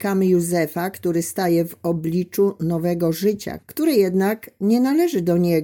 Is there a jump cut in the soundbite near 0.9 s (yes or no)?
no